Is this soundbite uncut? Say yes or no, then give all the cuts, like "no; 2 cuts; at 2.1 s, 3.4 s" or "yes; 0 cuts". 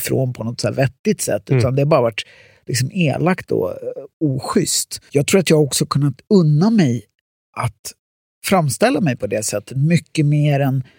no; 1 cut; at 5.1 s